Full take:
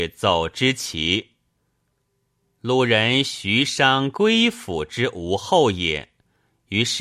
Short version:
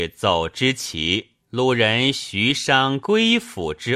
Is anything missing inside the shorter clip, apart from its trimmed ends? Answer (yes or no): yes